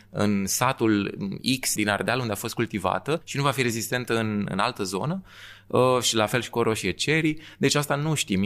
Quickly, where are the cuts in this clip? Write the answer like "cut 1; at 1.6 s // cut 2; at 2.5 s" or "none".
cut 1; at 1.8 s